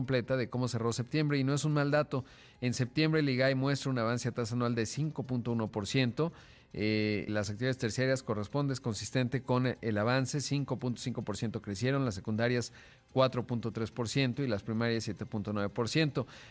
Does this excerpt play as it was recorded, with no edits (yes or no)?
no